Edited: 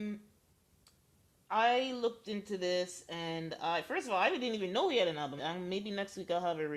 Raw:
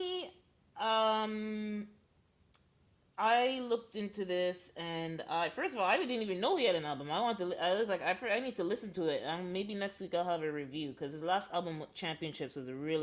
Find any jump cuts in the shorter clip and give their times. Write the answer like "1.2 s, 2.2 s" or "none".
5.4 s